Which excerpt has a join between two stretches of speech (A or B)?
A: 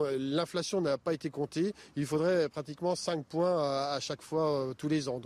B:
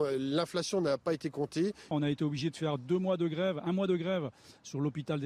B